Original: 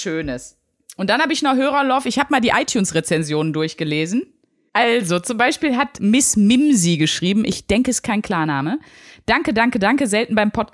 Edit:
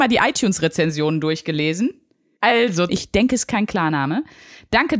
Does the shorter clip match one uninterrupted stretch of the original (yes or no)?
no